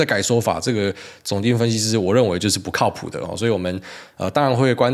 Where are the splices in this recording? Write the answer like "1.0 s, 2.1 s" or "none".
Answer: none